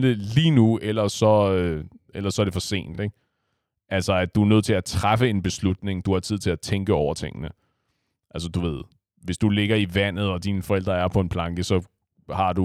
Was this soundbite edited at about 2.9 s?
no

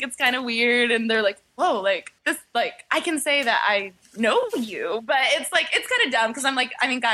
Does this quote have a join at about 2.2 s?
yes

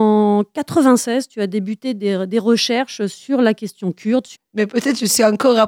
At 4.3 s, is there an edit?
yes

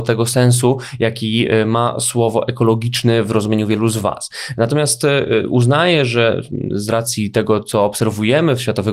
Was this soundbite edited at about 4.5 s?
no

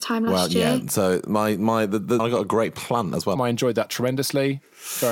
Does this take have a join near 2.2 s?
yes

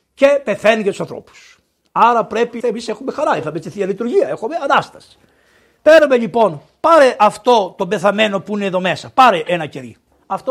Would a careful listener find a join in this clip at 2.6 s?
yes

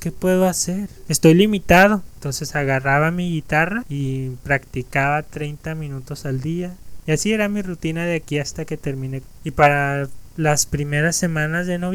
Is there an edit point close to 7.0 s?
yes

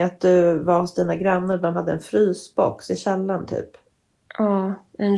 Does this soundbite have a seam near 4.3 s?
no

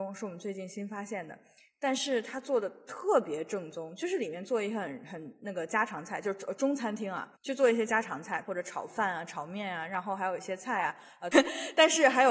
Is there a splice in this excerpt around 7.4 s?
yes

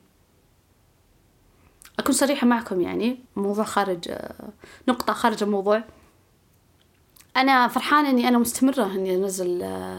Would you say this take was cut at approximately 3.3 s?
yes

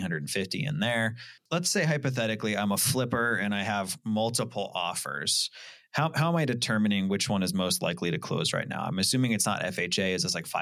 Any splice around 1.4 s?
yes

